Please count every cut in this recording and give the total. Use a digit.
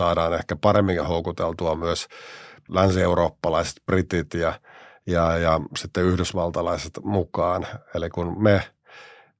1